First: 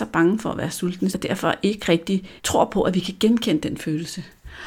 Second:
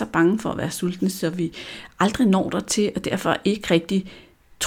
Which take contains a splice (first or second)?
first